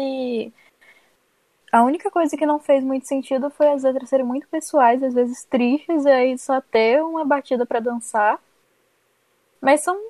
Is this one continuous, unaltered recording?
yes; 0 cuts

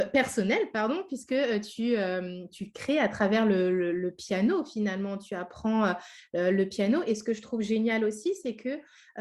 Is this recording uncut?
yes; 0 cuts

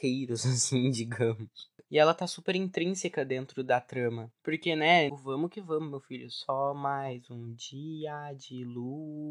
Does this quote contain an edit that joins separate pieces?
yes; 1 cut; at 5.1 s

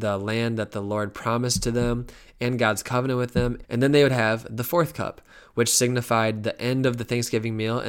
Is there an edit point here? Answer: yes; 1 cut; at 3.6 s

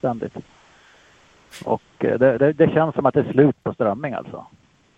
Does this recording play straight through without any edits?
yes; 0 cuts

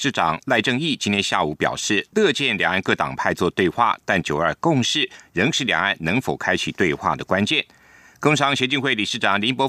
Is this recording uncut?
yes; 0 cuts

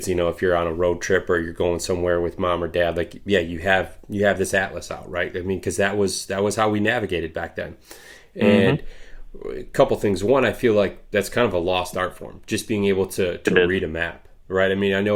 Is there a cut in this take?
no; 0 cuts

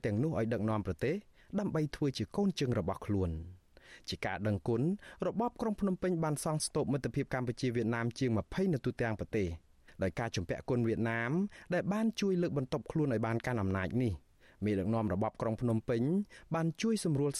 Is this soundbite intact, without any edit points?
yes; 0 cuts

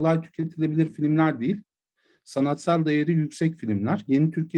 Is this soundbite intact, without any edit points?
yes; 0 cuts

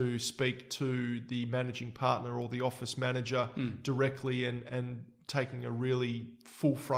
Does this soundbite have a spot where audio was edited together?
no; 0 cuts

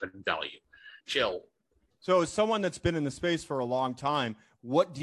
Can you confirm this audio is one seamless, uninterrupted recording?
no; 1 cut; at 1.0 s

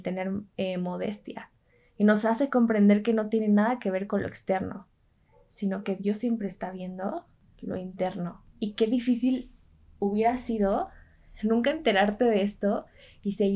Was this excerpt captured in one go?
yes; 0 cuts

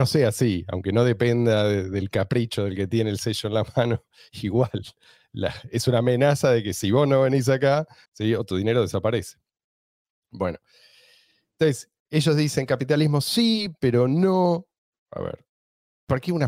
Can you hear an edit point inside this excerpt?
yes; 1 cut; at 8.1 s

